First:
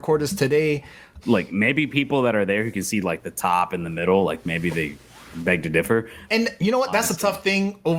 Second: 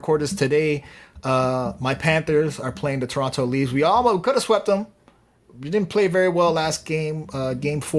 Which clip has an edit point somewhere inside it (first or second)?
first